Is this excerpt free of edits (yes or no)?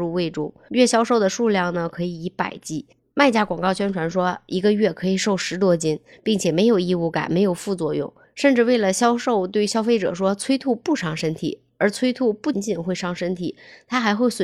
no